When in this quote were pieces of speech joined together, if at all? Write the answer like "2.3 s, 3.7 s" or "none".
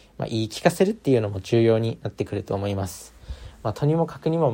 none